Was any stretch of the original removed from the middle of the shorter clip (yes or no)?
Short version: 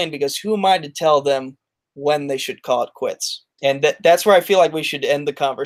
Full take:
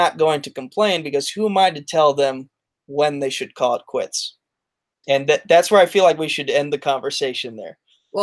yes